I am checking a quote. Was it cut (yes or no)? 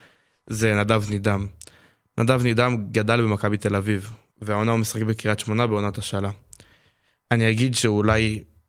no